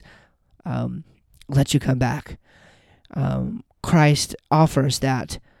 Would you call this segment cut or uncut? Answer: uncut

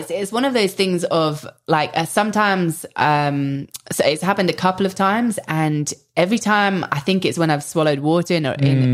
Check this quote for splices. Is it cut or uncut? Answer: uncut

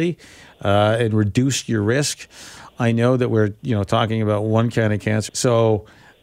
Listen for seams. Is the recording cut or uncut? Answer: cut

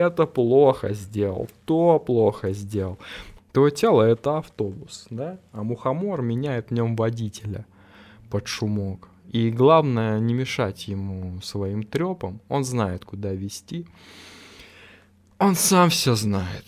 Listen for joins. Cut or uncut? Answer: cut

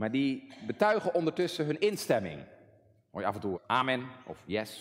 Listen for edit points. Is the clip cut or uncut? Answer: cut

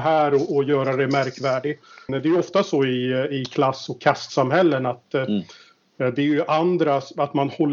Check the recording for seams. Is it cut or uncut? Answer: cut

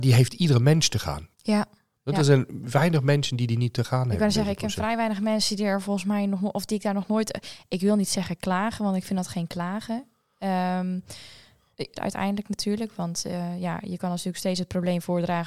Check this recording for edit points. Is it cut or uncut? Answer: cut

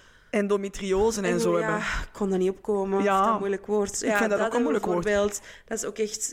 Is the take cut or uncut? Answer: uncut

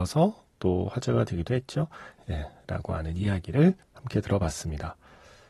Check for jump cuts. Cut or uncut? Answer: cut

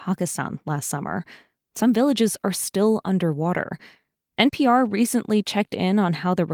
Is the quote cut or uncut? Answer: uncut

